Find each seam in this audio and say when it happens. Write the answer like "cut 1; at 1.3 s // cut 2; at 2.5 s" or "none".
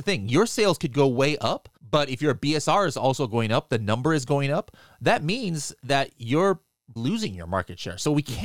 cut 1; at 1.8 s // cut 2; at 7.0 s